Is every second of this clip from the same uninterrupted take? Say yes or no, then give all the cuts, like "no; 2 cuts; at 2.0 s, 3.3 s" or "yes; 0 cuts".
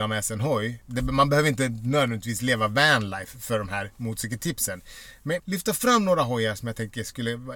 no; 1 cut; at 5.4 s